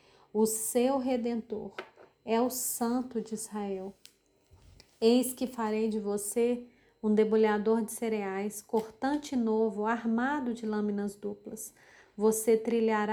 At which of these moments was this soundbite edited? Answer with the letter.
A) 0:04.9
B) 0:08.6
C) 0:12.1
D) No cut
D